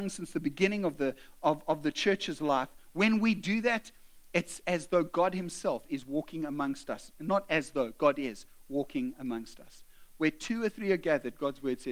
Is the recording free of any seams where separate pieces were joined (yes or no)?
yes